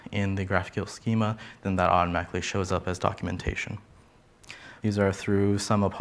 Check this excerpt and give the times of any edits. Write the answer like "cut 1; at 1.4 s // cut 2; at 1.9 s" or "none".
cut 1; at 4.8 s

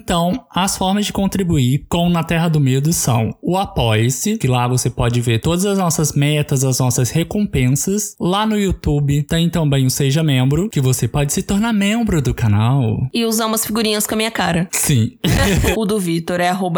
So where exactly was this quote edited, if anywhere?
cut 1; at 4.4 s // cut 2; at 15.7 s

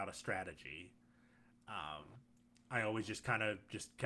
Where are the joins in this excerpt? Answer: none

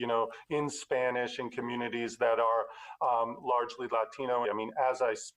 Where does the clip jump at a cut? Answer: cut 1; at 4.4 s

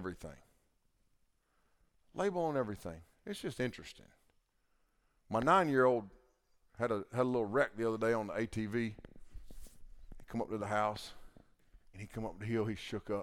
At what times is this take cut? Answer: cut 1; at 11.9 s

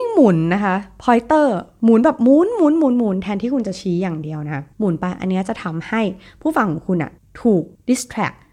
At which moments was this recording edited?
none

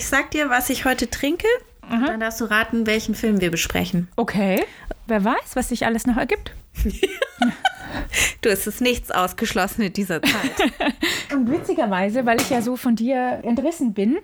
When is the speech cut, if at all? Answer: cut 1; at 5.1 s // cut 2; at 11.3 s

